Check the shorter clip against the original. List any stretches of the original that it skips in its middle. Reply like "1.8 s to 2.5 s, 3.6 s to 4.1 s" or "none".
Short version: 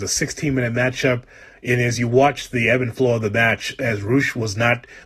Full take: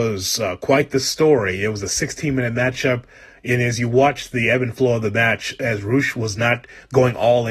none